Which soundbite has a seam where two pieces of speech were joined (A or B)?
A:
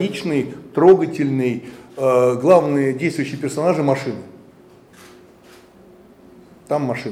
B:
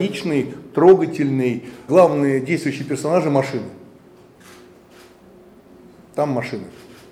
B